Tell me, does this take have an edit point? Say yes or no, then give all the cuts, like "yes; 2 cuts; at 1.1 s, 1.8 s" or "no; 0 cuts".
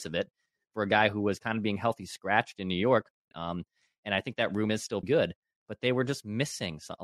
yes; 2 cuts; at 3.3 s, 5.0 s